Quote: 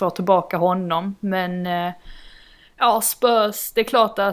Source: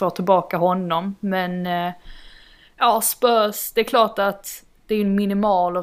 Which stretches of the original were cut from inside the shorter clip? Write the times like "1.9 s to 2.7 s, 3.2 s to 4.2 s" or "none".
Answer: none